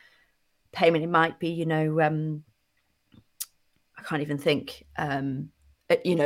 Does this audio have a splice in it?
no; 0 cuts

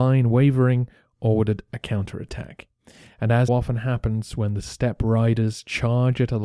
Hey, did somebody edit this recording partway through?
yes; 1 cut; at 3.5 s

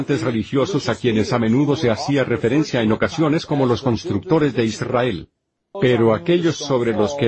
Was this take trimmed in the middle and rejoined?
yes; 1 cut; at 5.7 s

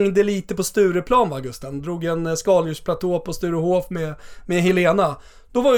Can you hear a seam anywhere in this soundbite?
no; 0 cuts

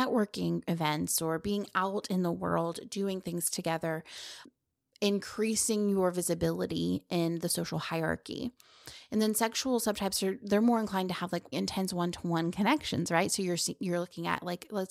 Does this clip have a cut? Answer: yes; 1 cut; at 11.5 s

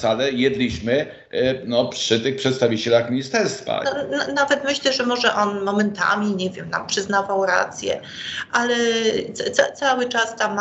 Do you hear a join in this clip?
yes; 1 cut; at 3.8 s

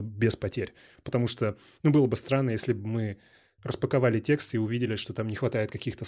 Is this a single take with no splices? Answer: yes; 0 cuts

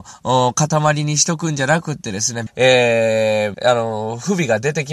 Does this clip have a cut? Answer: yes; 2 cuts; at 2.5 s, 3.5 s

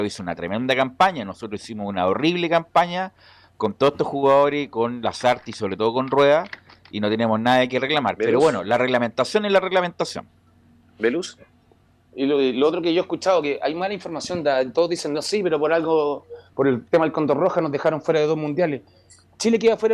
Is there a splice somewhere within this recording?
no; 0 cuts

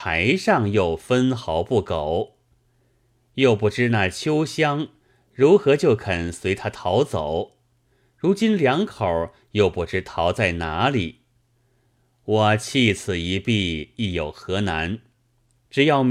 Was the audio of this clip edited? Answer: no; 0 cuts

